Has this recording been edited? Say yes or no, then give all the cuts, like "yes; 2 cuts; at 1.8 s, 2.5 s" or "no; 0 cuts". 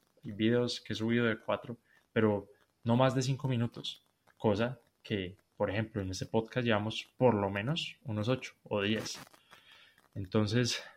no; 0 cuts